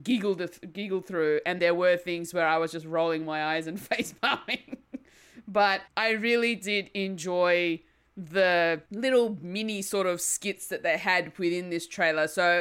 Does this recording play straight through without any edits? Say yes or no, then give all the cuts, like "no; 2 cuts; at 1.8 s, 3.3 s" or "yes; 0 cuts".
no; 3 cuts; at 1.6 s, 5.9 s, 8.9 s